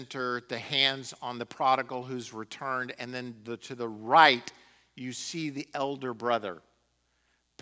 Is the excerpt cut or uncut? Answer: uncut